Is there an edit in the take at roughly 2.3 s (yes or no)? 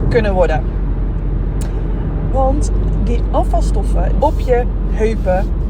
yes